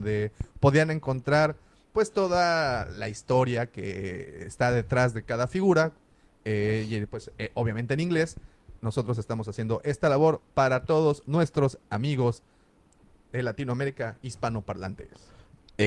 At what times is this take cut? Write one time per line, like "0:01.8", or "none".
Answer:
none